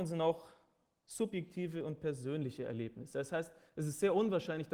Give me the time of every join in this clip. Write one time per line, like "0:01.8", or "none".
none